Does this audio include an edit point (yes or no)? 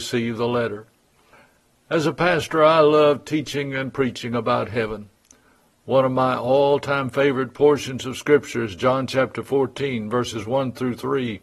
no